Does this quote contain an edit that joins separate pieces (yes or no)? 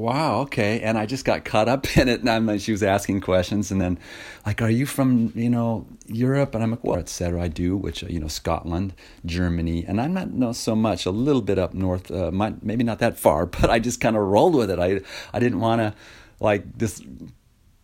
yes